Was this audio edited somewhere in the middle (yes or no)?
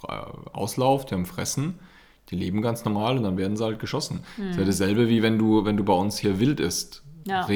no